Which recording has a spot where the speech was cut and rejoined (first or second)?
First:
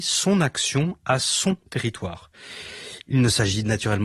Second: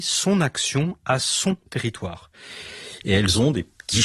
second